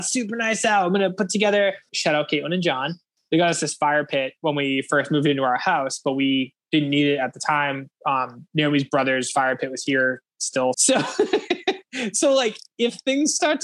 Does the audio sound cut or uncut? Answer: cut